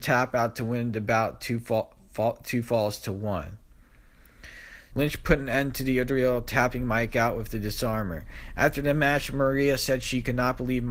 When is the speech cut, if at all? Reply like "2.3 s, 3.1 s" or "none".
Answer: 4.9 s